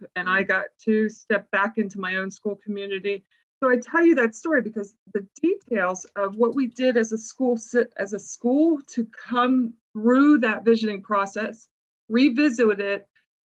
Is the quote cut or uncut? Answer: cut